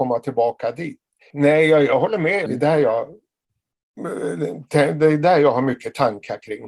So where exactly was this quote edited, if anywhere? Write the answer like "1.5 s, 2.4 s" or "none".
1.3 s, 2.5 s